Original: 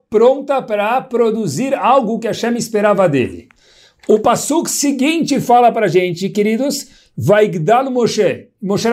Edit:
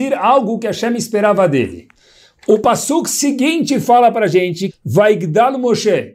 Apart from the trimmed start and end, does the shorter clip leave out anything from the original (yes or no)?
yes